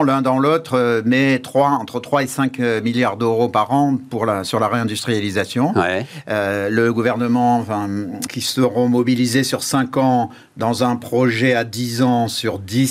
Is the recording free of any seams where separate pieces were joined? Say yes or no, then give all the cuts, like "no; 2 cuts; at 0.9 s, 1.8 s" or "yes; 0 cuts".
no; 1 cut; at 8.3 s